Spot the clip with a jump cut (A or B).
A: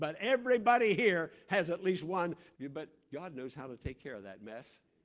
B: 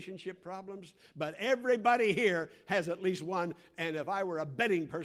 A